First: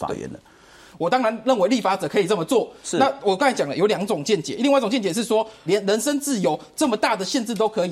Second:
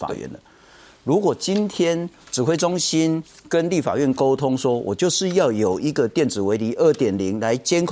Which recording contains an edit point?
first; 2 cuts; at 0.9 s, 5.7 s

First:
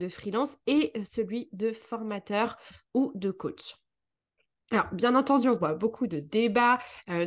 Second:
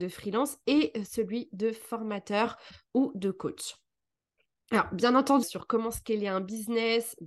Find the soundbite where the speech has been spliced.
second; 1 cut; at 5.4 s

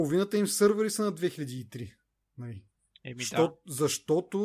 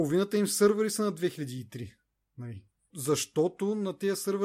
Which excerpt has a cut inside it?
second; 1 cut; at 2.9 s

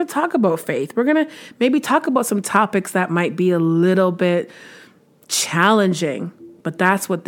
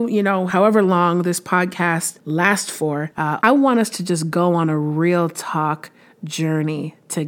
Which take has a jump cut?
second; 1 cut; at 3.4 s

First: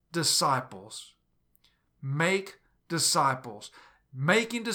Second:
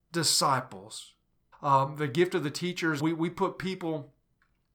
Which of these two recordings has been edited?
second; 2 cuts; at 1.5 s, 3.0 s

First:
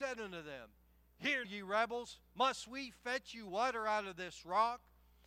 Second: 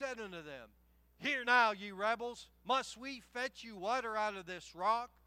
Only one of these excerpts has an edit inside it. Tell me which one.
first; 1 cut; at 1.4 s

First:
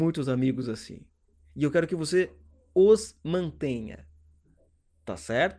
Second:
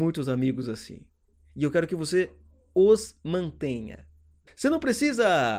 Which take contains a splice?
second; 1 cut; at 4.5 s

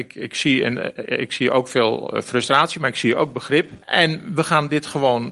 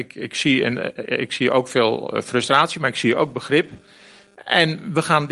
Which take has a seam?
first; 1 cut; at 3.8 s

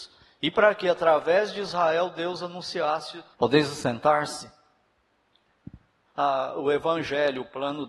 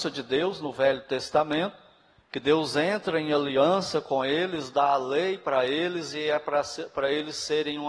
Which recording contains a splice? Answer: first; 2 cuts; at 3.3 s, 6.1 s

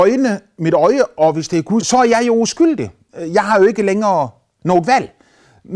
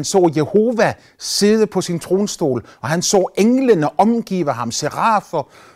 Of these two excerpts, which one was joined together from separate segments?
first; 1 cut; at 1.8 s

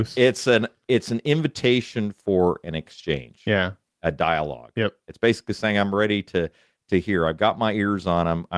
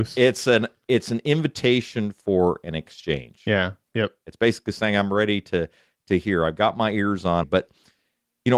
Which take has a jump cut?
second; 2 cuts; at 3.9 s, 7.4 s

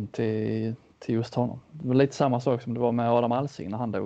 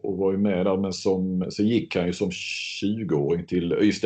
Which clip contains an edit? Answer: second; 1 cut; at 1.4 s

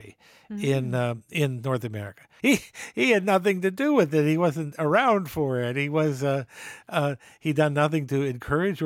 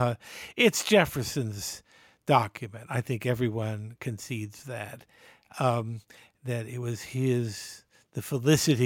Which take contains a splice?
first; 1 cut; at 2.4 s

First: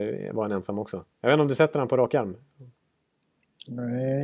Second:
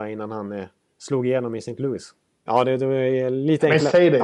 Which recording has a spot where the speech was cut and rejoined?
second; 1 cut; at 2.5 s

